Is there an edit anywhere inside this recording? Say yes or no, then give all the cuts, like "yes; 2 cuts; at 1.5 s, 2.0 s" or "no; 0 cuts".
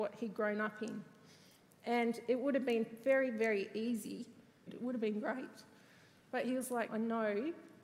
yes; 2 cuts; at 4.7 s, 6.9 s